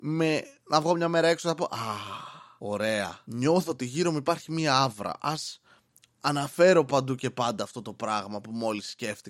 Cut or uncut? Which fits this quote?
uncut